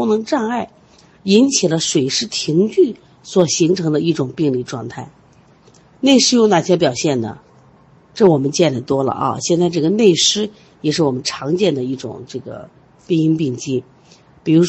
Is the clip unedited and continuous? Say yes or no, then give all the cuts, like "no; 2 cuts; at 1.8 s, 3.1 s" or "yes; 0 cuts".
yes; 0 cuts